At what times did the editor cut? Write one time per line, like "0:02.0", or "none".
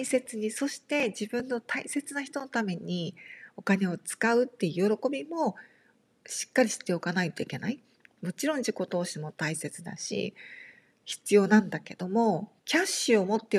0:12.6

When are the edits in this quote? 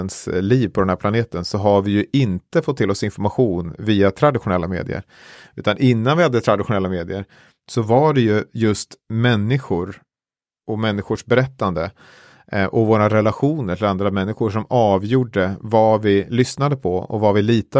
none

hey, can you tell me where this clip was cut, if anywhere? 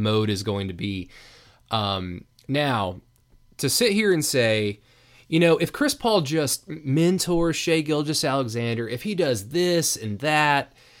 none

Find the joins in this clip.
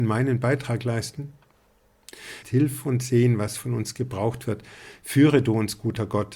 0:02.4

